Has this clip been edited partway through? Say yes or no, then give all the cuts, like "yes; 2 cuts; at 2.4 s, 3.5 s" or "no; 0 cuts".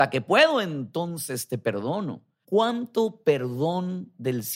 yes; 1 cut; at 2.4 s